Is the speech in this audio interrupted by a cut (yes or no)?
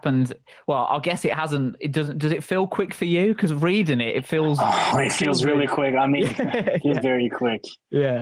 yes